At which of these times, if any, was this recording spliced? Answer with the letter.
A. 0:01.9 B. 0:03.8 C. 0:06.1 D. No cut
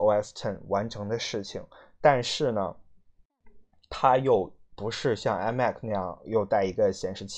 D